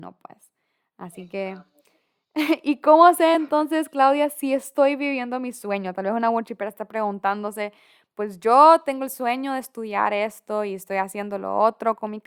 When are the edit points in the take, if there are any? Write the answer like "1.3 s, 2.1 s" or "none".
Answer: none